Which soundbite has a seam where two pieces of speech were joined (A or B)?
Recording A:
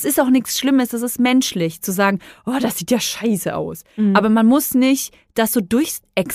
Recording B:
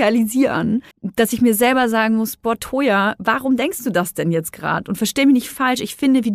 B